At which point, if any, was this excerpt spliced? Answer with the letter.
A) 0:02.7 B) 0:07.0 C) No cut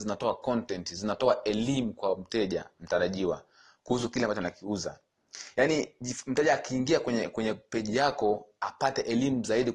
A